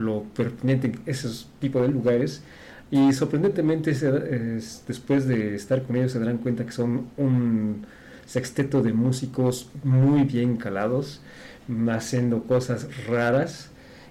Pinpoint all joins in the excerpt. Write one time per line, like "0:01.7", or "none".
none